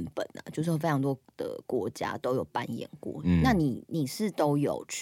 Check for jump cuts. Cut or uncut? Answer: uncut